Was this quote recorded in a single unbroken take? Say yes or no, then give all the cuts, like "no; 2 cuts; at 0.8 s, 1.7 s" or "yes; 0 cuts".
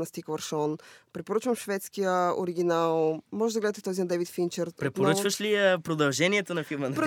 yes; 0 cuts